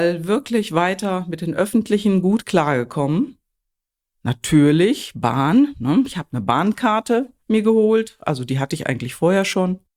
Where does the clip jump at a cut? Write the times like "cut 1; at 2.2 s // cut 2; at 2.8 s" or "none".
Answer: none